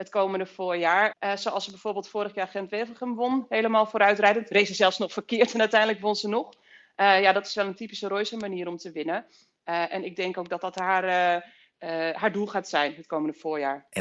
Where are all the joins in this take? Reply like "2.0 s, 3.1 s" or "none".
1.1 s